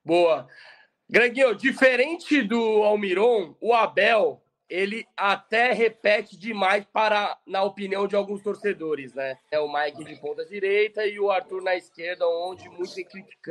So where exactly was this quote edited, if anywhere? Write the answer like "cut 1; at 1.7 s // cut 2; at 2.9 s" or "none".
cut 1; at 9.5 s